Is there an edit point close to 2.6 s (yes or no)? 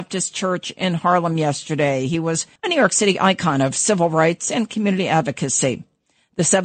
yes